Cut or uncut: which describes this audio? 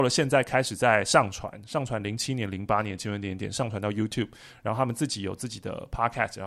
uncut